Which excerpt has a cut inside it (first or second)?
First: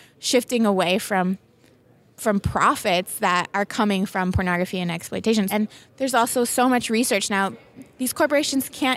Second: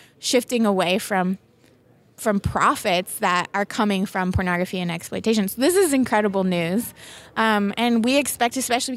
first